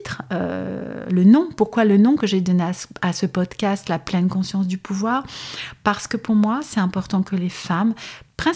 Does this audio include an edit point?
no; 0 cuts

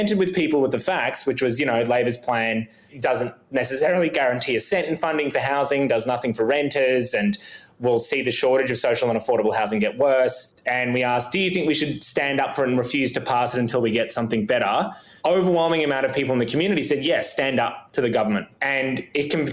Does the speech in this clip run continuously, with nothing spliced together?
yes; 0 cuts

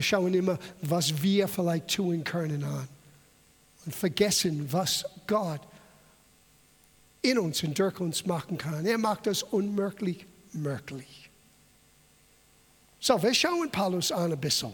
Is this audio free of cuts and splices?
yes; 0 cuts

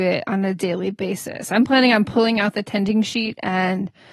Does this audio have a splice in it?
no; 0 cuts

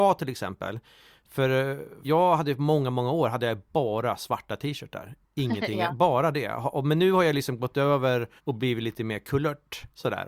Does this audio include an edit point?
yes; 2 cuts; at 2.0 s, 8.4 s

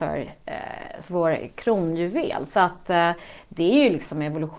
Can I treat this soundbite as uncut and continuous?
no; 1 cut; at 1.0 s

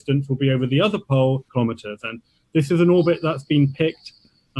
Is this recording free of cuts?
no; 1 cut; at 1.5 s

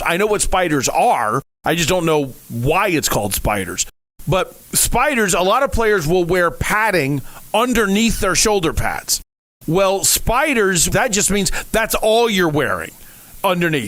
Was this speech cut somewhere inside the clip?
yes; 1 cut; at 10.9 s

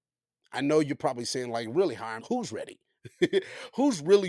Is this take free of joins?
no; 1 cut; at 2.2 s

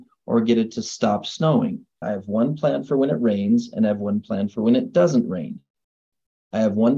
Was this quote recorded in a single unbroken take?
no; 1 cut; at 2.0 s

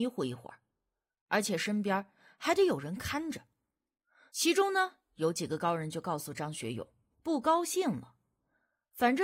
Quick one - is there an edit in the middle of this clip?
yes; 2 cuts; at 4.3 s, 7.1 s

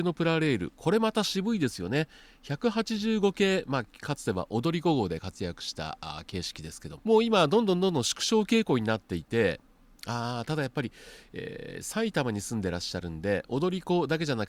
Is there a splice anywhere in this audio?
yes; 1 cut; at 7.0 s

